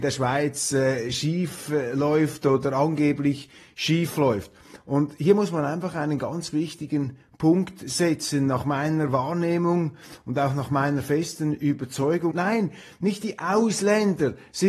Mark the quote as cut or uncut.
cut